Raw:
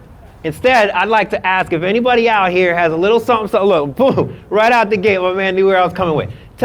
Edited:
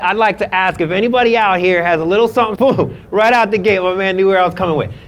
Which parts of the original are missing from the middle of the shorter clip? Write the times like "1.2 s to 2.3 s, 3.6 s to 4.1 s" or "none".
3.5 s to 3.9 s